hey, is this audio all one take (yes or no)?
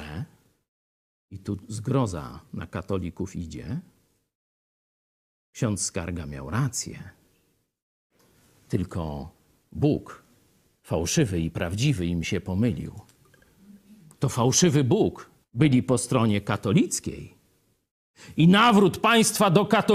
no